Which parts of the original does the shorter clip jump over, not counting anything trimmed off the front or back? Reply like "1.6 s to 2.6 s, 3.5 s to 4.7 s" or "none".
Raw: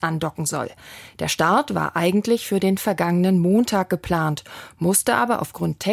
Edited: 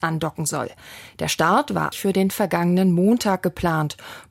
1.9 s to 2.4 s